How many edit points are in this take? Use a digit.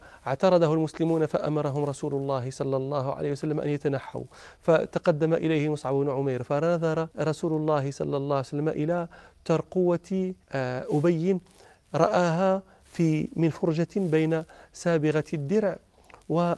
2